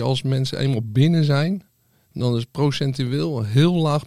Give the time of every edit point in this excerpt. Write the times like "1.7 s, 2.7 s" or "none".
none

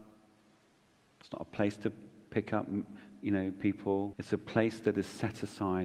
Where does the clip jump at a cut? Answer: 4.1 s

